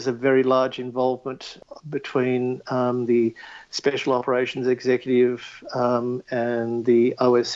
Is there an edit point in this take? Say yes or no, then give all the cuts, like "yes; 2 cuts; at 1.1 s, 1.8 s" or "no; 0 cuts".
no; 0 cuts